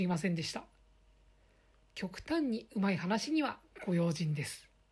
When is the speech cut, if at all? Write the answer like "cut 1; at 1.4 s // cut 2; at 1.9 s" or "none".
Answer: cut 1; at 1.8 s